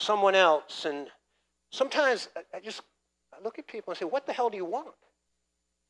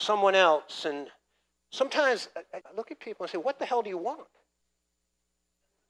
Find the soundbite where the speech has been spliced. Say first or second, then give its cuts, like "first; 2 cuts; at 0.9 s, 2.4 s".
second; 1 cut; at 2.6 s